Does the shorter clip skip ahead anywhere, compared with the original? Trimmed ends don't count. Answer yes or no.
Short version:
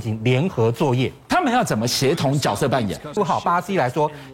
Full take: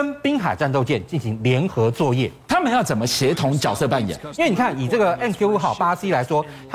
yes